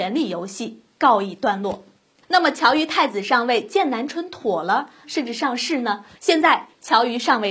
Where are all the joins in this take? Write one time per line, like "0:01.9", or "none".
0:05.0
0:06.1